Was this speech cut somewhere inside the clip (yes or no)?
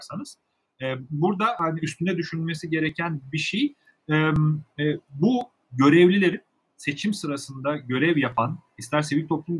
no